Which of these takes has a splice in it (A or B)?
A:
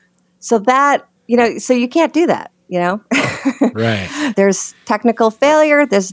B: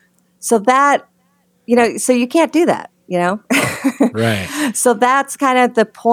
A